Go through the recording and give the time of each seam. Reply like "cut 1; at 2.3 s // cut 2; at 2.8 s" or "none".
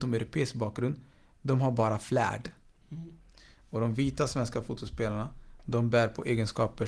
cut 1; at 2.8 s